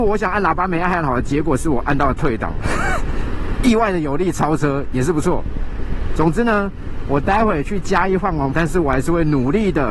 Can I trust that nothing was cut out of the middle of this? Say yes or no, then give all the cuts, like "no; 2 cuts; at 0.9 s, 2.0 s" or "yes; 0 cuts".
no; 2 cuts; at 6.2 s, 8.5 s